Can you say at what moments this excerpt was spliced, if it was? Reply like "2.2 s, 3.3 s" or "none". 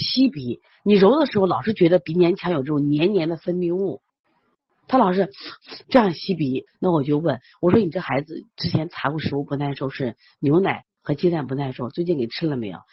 6.7 s